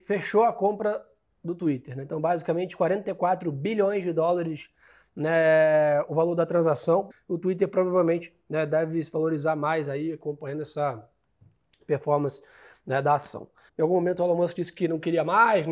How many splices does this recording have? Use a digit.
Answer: 2